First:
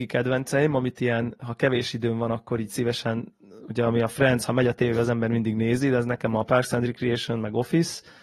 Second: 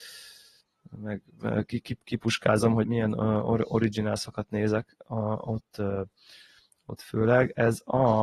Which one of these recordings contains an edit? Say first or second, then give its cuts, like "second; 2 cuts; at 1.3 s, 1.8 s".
second; 1 cut; at 2.8 s